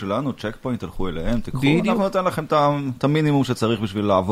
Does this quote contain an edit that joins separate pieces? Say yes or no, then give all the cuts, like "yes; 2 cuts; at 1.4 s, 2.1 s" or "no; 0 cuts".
no; 0 cuts